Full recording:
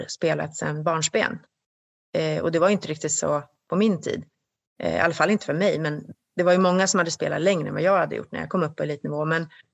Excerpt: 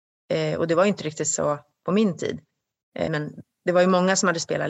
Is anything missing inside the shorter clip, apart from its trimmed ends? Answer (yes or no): yes